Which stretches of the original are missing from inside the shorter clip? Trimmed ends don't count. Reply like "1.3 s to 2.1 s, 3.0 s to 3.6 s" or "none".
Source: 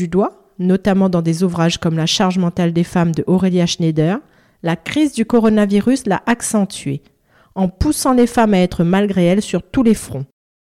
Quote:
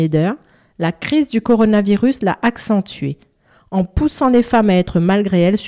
none

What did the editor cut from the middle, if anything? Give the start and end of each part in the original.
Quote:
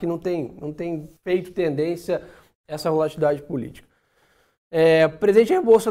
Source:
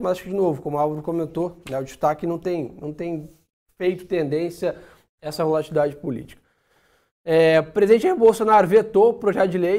3.4 s to 3.7 s

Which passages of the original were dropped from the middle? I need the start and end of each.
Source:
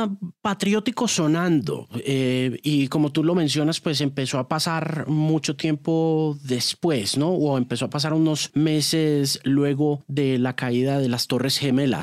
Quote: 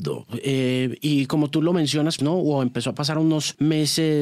3.8 s to 7.1 s

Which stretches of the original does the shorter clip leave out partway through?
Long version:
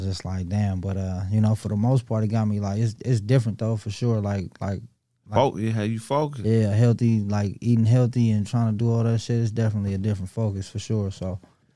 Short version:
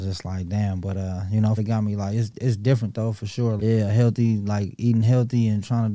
1.6 s to 2.2 s, 4.2 s to 6.4 s

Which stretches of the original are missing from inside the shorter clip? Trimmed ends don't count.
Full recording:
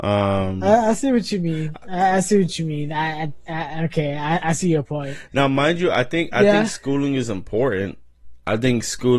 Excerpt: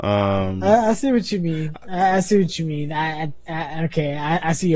none

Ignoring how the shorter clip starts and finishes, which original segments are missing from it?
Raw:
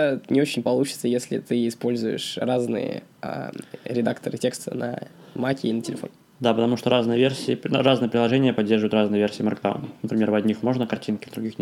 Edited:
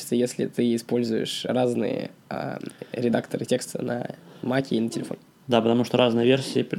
none

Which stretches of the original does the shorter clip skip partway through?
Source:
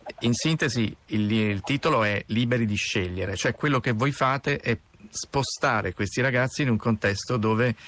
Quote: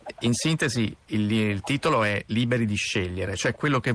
none

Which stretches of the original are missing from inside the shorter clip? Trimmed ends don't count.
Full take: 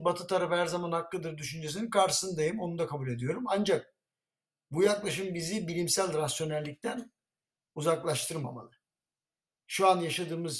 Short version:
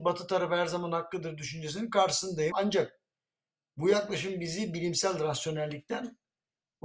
2.5 s to 3.5 s

